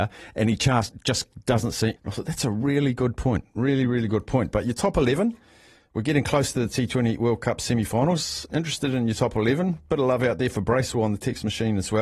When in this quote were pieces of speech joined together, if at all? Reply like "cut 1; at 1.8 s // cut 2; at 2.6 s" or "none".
cut 1; at 2.0 s